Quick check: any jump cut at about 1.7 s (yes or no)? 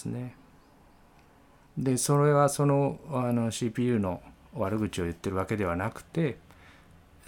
yes